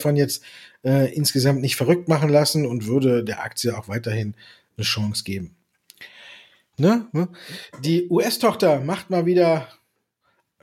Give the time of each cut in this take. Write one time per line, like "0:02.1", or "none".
0:06.7